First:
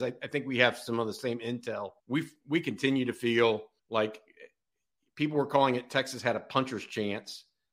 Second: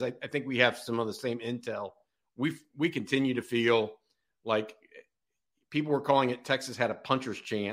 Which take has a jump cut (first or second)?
first